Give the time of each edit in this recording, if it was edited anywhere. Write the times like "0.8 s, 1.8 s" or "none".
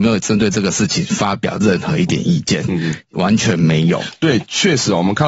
none